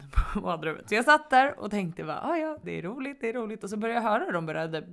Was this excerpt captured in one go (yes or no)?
no